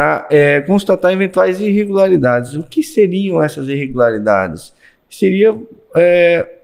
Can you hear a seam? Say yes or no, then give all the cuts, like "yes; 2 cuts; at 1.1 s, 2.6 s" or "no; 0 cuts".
no; 0 cuts